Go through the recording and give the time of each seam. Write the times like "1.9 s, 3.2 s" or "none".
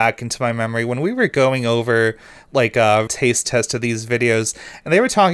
3.1 s

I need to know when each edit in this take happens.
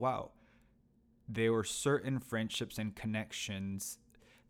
none

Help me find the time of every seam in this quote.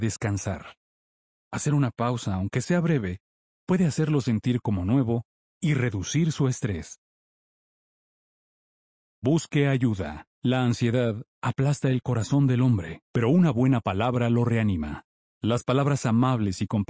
10.3 s, 13.1 s, 15.3 s

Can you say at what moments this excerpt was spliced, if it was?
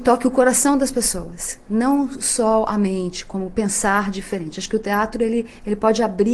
none

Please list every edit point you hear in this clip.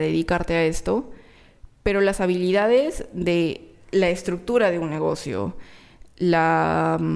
none

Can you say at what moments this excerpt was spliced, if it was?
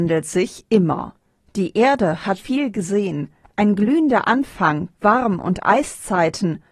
2.4 s, 4.9 s

